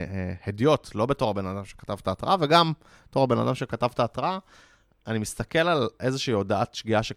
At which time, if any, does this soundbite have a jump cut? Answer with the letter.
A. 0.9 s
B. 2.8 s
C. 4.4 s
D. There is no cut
D